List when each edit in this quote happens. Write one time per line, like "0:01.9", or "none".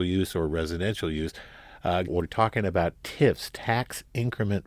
0:02.1